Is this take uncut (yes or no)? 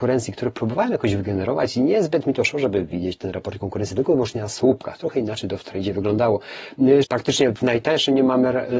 no